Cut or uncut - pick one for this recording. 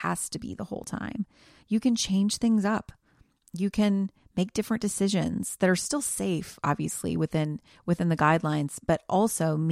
uncut